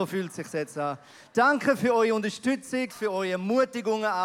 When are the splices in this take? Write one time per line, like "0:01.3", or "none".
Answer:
0:02.9

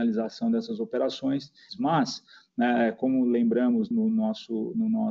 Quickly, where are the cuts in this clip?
0:01.7
0:03.9

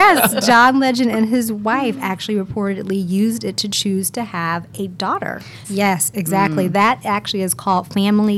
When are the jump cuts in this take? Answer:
0:05.6

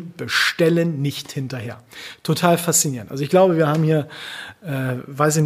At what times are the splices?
none

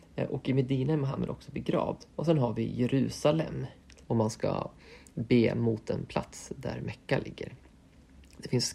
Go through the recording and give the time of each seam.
0:02.1
0:04.0

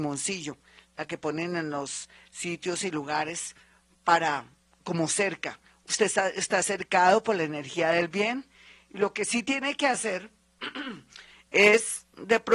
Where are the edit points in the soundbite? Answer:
none

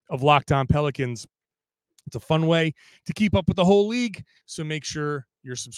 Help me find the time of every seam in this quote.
0:04.4

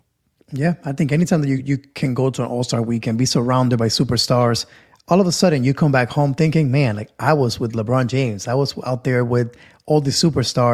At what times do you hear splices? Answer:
none

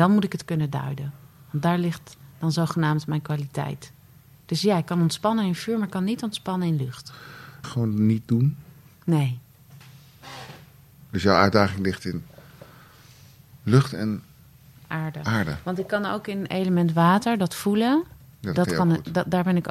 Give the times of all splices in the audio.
0:07.6

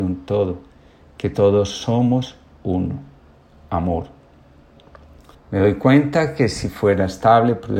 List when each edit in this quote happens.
0:05.3

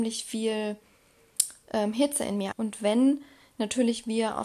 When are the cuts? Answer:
0:02.5

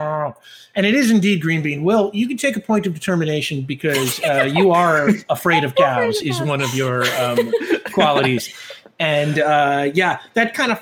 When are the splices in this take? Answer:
none

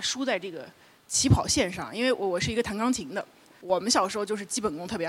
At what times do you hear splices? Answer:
0:03.5

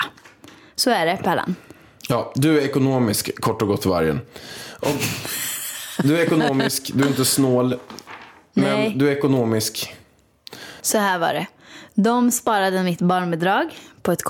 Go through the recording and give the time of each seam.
0:10.8

